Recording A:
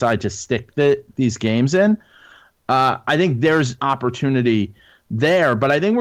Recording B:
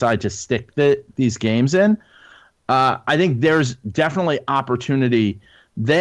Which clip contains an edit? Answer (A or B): A